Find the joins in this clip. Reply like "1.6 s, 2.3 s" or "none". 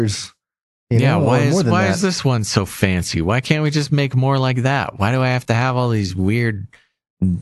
none